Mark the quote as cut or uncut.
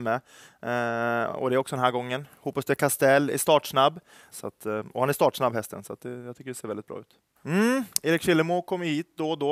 cut